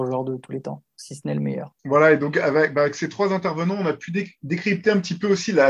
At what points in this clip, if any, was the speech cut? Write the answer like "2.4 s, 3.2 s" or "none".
1.8 s